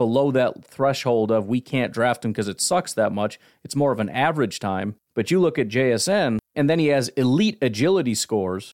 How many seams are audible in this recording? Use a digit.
2